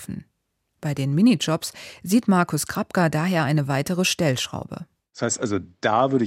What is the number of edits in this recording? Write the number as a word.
zero